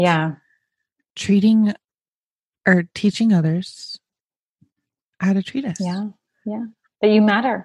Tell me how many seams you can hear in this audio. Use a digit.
0